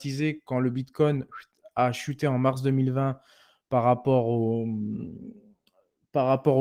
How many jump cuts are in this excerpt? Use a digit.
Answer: 0